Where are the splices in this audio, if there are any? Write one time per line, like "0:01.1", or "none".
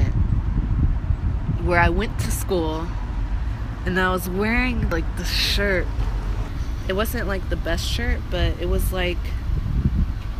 none